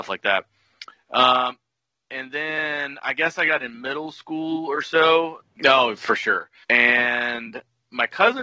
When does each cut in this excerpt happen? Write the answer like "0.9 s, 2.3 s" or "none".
5.4 s, 6.6 s